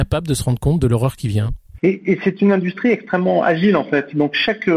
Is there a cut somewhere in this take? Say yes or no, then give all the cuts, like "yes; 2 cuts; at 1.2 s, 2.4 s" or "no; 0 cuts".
yes; 1 cut; at 1.8 s